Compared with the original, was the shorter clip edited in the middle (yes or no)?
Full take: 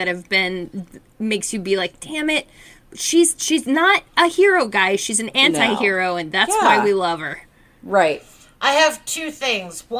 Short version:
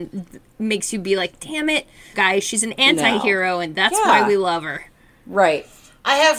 yes